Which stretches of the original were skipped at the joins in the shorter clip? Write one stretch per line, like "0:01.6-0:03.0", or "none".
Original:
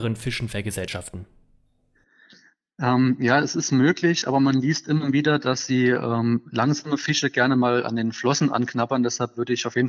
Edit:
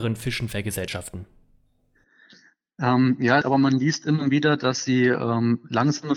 0:03.4-0:04.2